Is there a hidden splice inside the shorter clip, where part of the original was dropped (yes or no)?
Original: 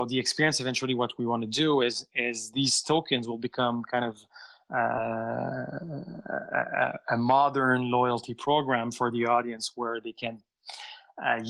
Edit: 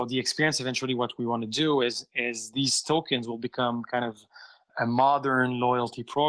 yes